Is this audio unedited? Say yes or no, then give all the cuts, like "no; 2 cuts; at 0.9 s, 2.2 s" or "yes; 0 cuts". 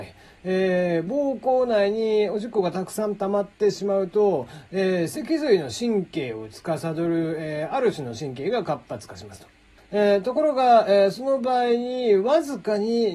no; 1 cut; at 9.8 s